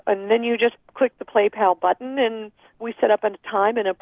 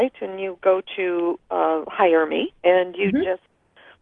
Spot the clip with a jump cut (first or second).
second